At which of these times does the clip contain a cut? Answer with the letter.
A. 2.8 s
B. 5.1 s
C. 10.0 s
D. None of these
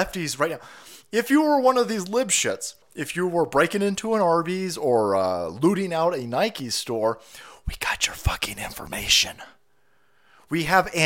A